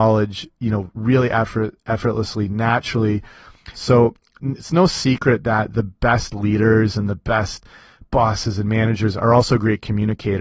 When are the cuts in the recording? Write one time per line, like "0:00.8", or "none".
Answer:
0:03.7